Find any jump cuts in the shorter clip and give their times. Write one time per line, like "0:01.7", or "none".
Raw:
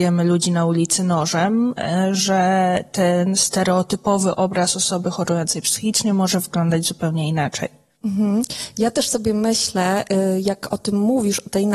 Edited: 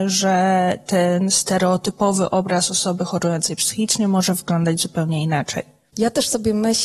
0:05.9

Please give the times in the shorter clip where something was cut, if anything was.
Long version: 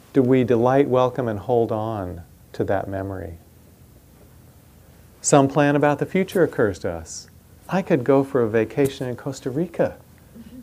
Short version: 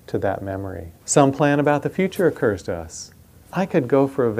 0:01.0

